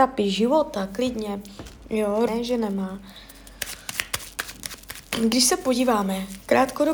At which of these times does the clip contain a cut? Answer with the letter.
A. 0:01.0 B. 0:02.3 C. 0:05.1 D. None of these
B